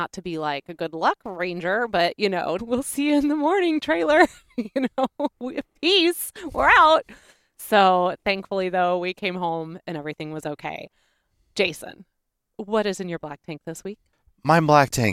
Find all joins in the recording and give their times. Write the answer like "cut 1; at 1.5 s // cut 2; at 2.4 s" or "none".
cut 1; at 2.6 s